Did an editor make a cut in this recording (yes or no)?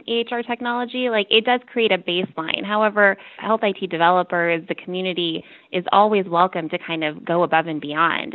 yes